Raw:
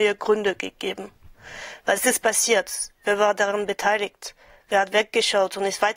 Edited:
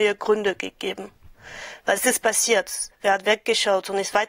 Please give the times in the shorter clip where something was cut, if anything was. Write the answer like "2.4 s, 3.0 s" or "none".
2.9 s